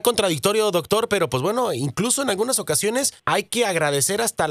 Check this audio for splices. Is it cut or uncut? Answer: cut